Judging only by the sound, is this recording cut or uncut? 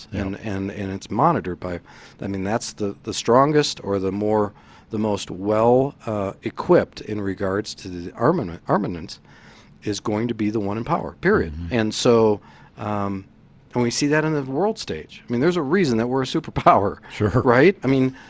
uncut